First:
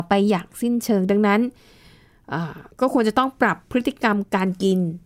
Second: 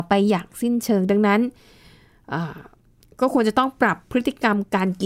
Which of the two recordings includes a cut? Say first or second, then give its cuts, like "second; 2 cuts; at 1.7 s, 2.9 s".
first; 1 cut; at 2.7 s